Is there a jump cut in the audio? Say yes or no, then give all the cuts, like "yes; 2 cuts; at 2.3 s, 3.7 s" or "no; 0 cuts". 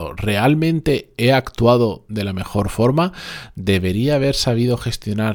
no; 0 cuts